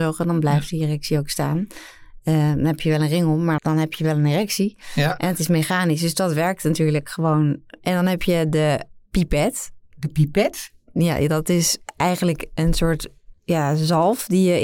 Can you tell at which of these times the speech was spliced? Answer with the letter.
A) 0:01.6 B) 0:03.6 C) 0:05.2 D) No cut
B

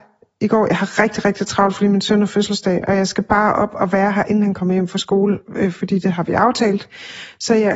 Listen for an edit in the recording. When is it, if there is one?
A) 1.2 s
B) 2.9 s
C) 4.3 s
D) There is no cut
D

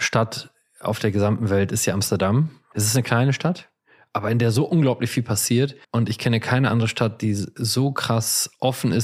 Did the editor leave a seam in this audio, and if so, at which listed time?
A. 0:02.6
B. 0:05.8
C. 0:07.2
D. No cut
B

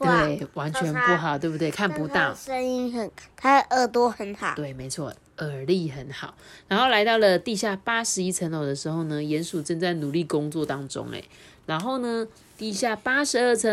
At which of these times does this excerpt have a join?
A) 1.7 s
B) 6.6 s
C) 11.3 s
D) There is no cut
D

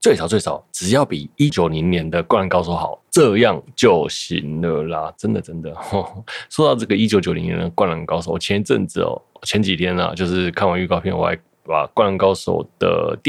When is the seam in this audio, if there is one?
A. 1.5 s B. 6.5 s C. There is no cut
A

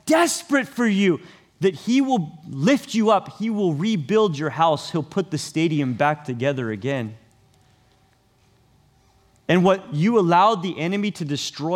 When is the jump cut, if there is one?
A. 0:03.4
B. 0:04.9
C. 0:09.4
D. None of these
D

